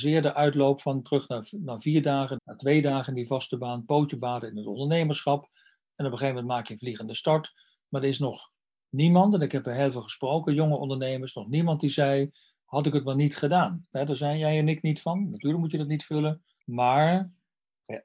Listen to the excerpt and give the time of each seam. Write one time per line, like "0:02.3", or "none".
0:02.4
0:13.9
0:16.6